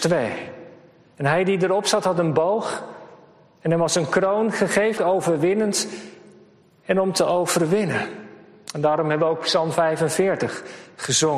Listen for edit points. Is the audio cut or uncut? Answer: cut